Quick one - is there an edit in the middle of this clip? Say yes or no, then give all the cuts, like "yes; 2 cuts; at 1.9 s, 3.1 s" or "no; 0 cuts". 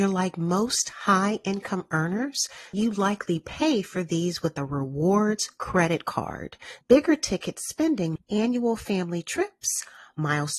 yes; 3 cuts; at 2.7 s, 6.8 s, 8.2 s